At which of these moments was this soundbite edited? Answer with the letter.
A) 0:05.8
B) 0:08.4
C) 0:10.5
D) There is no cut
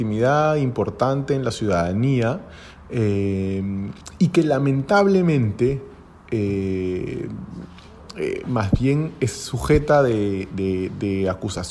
D